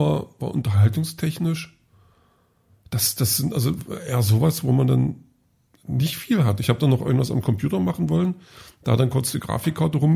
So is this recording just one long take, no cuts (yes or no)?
yes